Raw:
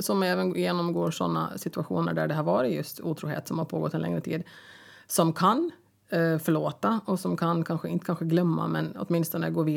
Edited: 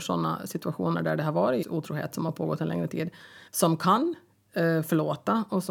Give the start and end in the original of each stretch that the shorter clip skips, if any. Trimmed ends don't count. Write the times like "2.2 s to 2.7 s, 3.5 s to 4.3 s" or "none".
2.7 s to 2.9 s, 4.8 s to 5.0 s